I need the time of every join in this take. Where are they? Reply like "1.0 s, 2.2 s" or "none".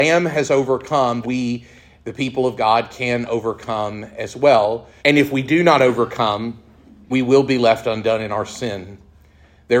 1.2 s, 5.0 s, 7.1 s